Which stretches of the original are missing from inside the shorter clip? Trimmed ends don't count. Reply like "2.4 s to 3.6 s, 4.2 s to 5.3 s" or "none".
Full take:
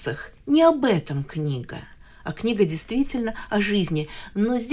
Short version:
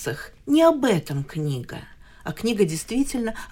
none